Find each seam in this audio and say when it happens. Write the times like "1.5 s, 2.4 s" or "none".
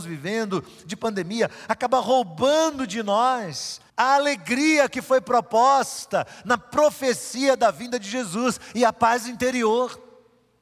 3.9 s